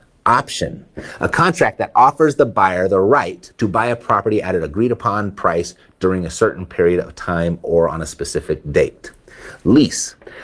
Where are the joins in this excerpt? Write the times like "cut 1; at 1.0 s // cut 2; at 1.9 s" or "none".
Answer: cut 1; at 3.5 s